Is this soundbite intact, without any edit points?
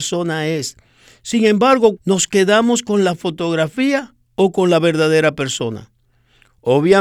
no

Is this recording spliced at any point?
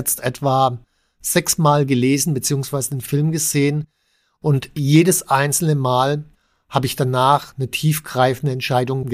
no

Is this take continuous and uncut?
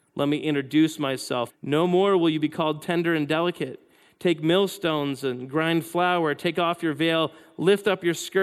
no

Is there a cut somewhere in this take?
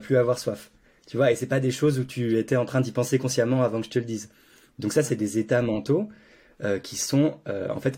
no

